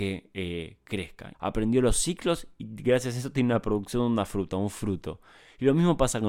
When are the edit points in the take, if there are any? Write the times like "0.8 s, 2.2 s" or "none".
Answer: 1.3 s